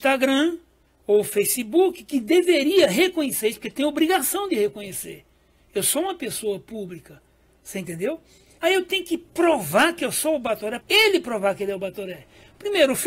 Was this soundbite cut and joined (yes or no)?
yes